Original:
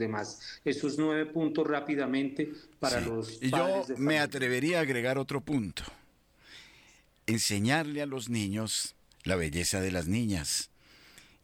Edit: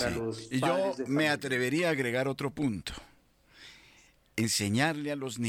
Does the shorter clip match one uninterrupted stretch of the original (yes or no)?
yes